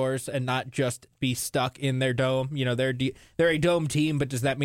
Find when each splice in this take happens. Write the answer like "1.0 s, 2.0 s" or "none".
none